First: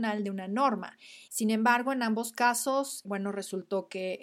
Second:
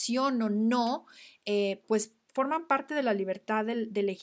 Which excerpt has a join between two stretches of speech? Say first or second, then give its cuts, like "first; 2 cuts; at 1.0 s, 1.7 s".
first; 2 cuts; at 1.3 s, 3.0 s